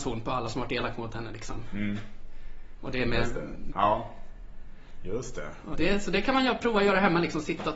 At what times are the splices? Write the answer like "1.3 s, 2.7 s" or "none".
3.7 s, 5.7 s